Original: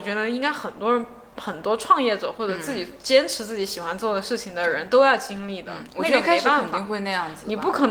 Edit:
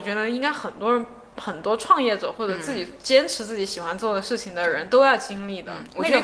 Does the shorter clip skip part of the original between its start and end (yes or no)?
no